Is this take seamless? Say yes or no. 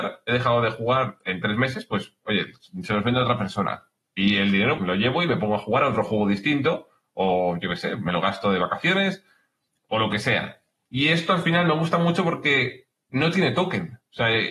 no